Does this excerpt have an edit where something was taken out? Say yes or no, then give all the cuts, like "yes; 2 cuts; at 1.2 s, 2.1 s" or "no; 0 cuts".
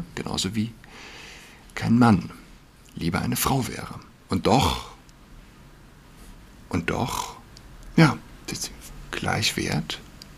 yes; 1 cut; at 7.9 s